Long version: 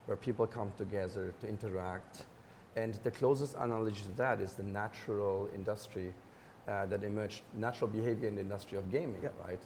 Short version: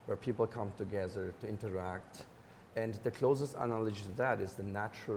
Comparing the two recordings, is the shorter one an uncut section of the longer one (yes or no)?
yes